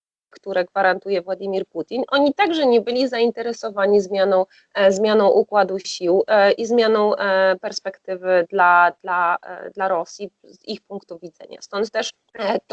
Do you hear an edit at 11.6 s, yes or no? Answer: no